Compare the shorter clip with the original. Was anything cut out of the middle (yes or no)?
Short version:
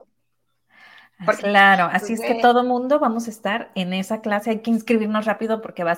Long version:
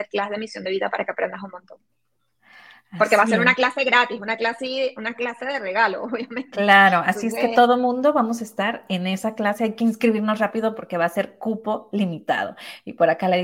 yes